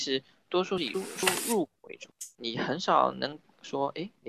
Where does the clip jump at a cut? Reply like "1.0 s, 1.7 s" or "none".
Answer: 0.9 s, 2.3 s